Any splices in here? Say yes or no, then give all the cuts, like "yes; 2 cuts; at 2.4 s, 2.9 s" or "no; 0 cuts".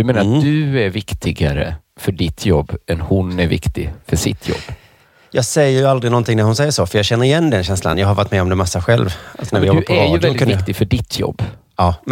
no; 0 cuts